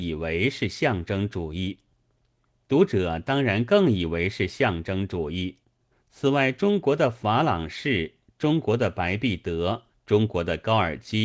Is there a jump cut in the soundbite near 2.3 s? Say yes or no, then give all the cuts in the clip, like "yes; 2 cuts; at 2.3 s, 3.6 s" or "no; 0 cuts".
no; 2 cuts; at 5.9 s, 9.9 s